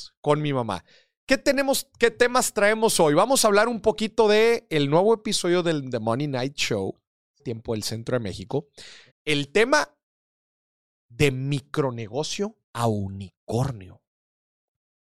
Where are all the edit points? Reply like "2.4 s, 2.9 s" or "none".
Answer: 7.4 s, 9.1 s, 12.6 s